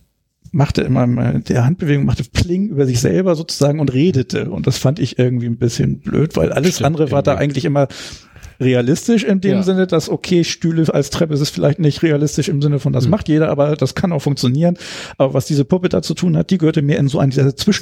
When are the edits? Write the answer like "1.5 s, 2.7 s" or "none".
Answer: none

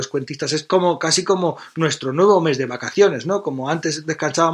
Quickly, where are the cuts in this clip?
none

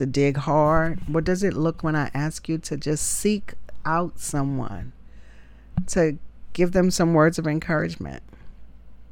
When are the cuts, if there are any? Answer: 1.8 s

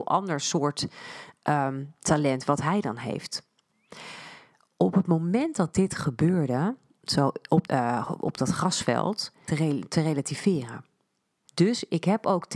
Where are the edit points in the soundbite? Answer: 7.7 s, 9.5 s, 11.5 s

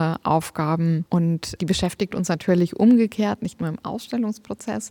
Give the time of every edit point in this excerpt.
1.6 s

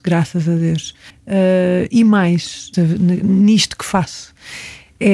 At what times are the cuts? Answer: 1.1 s, 2.7 s

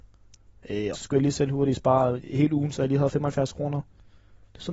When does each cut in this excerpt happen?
0.9 s

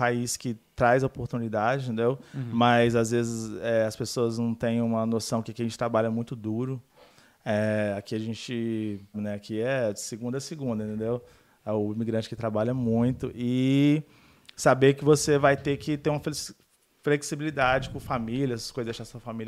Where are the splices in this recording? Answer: 9.1 s

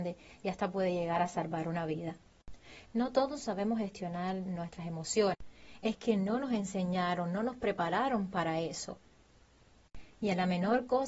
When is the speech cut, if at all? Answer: none

